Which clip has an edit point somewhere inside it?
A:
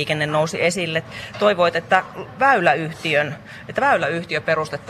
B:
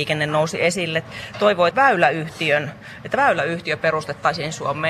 B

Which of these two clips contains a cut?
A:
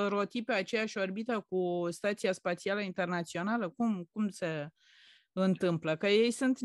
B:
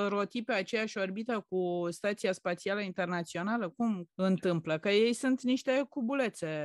B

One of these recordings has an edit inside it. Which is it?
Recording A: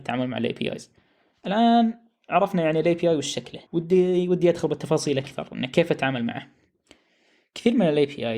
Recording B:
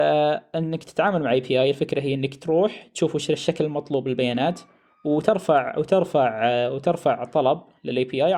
A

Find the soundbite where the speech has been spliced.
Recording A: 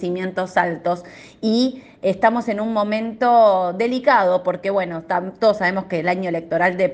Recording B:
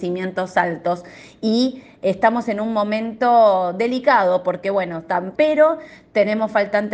B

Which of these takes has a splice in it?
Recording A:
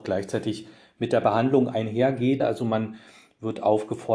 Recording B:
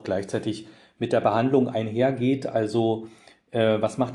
A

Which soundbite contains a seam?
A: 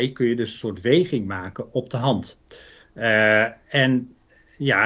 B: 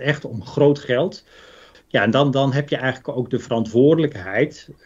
B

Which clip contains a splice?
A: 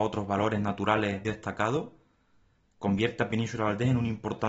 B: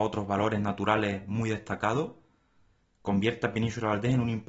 A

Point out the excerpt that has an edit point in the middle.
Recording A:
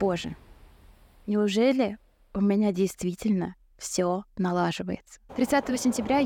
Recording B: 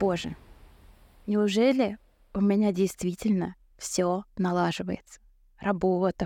A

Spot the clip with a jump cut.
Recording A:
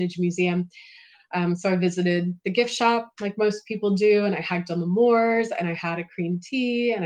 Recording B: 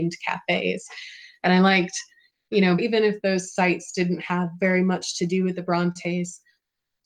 B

